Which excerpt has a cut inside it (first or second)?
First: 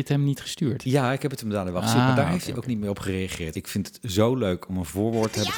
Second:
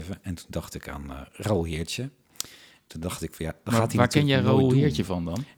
first